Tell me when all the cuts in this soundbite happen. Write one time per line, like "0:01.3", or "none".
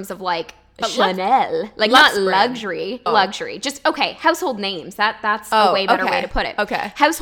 0:03.1